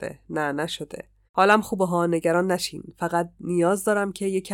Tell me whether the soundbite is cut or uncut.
cut